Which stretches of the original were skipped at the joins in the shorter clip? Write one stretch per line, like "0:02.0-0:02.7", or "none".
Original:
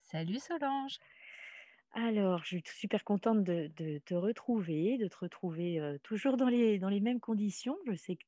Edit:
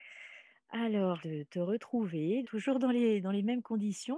0:02.4-0:03.7
0:05.0-0:06.0